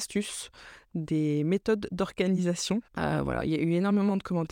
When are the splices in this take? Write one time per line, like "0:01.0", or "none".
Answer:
0:02.9